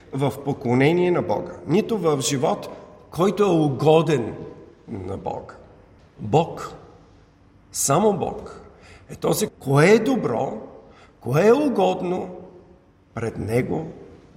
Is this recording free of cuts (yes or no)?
no